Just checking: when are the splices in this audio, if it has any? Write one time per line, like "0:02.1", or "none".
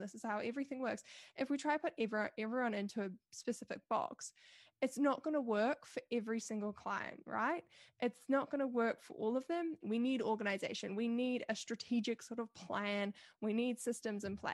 0:09.8